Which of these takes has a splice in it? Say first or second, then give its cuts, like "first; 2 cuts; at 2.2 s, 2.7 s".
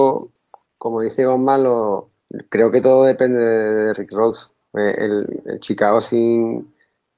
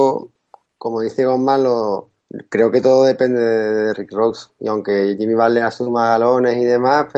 second; 1 cut; at 4.6 s